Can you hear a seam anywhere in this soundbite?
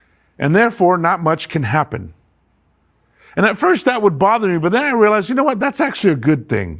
no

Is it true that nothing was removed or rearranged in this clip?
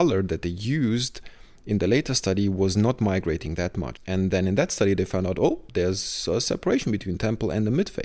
no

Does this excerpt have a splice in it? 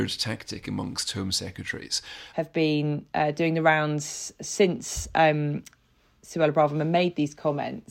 yes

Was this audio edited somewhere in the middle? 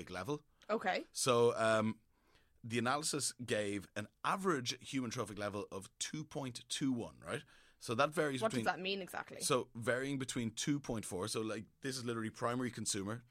no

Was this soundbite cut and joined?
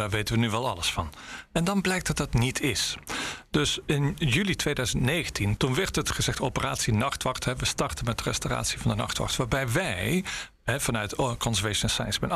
yes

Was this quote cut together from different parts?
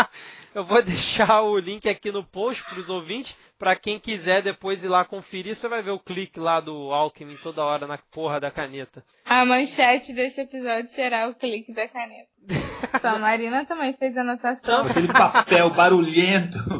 yes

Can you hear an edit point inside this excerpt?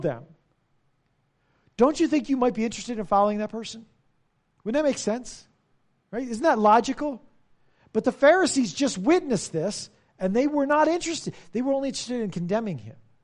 no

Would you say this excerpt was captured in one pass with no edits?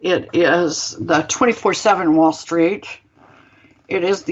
yes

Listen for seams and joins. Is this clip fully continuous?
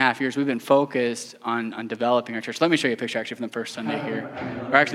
yes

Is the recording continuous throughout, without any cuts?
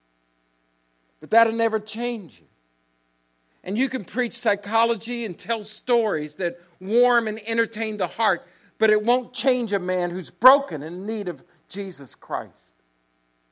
yes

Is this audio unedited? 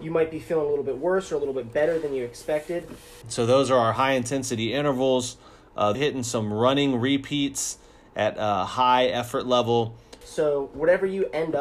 no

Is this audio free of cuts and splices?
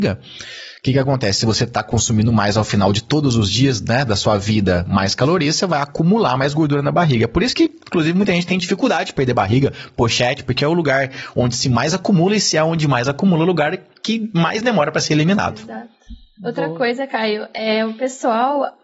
yes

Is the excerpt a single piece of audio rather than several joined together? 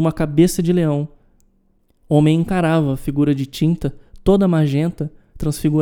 yes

